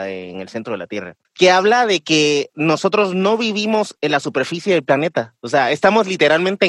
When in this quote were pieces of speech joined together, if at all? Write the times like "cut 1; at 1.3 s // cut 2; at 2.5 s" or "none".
cut 1; at 1.2 s // cut 2; at 2.5 s